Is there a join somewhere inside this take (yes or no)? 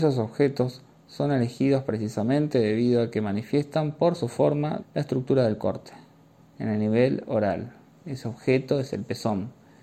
yes